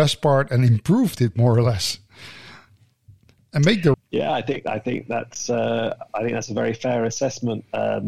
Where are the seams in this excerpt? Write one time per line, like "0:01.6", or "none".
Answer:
0:03.9